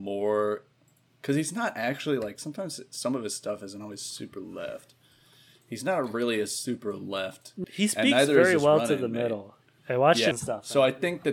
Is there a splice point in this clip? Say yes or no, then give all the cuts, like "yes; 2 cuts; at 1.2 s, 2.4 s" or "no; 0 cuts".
yes; 2 cuts; at 7.6 s, 10.3 s